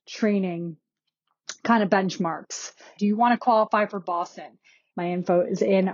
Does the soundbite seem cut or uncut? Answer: cut